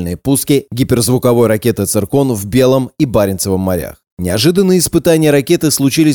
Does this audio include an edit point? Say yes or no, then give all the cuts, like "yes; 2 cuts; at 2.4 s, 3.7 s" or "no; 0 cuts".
yes; 1 cut; at 4.1 s